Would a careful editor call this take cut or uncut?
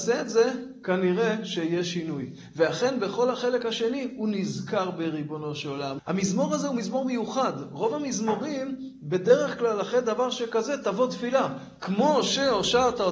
cut